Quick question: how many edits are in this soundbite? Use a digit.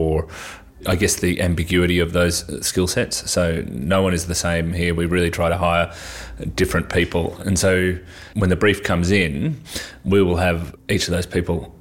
1